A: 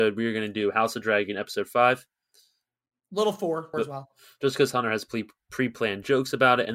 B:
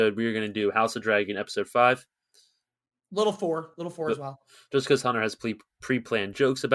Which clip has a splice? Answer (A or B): A